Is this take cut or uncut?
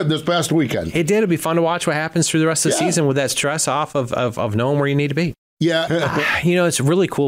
cut